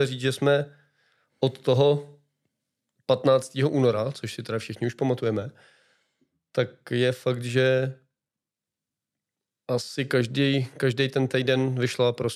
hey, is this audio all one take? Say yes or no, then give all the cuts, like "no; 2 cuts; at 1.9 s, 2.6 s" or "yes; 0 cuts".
yes; 0 cuts